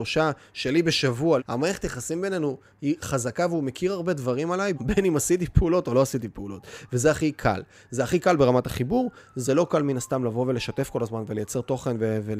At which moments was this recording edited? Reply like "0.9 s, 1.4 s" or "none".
1.4 s, 4.7 s